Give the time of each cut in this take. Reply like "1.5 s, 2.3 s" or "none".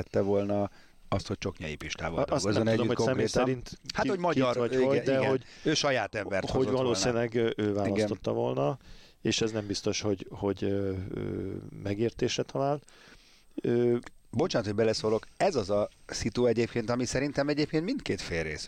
14.2 s